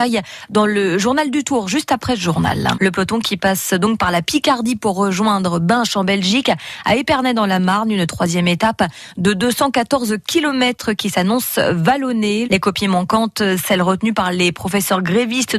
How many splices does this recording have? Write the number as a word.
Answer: two